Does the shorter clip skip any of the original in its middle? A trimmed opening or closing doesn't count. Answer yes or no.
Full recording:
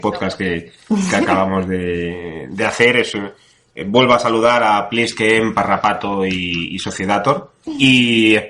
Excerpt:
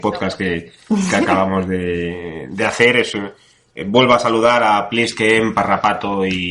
no